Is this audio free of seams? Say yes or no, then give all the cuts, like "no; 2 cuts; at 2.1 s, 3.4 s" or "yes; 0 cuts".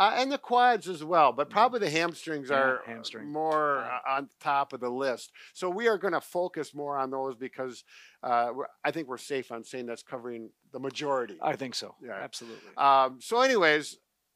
yes; 0 cuts